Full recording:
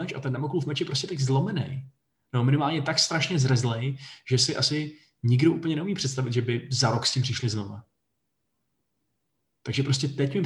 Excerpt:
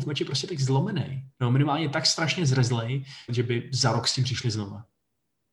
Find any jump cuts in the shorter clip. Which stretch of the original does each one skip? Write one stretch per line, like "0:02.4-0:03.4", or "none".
0:01.9-0:02.3
0:04.2-0:06.3